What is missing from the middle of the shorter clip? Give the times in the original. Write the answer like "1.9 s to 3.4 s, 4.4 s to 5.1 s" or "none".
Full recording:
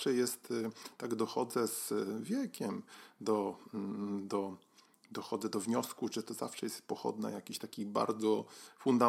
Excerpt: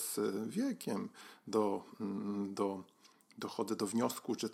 none